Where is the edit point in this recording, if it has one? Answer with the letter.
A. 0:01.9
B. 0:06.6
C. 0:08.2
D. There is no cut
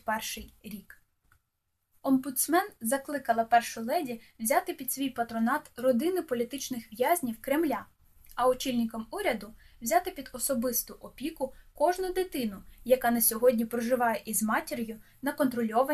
A